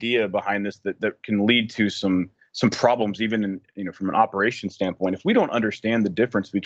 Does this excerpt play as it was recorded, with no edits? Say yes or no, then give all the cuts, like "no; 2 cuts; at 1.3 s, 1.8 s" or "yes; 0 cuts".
yes; 0 cuts